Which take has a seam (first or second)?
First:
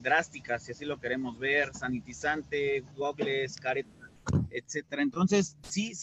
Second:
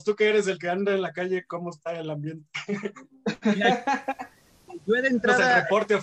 first